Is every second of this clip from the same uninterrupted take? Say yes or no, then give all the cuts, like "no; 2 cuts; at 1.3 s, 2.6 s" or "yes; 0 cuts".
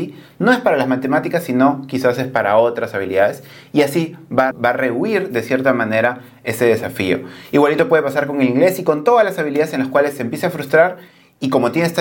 no; 1 cut; at 4.5 s